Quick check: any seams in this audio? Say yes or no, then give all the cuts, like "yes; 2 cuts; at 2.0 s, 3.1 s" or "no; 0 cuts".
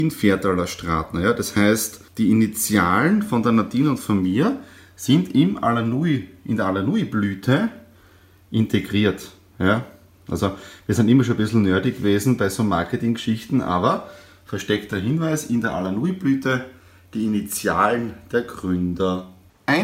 yes; 1 cut; at 2.1 s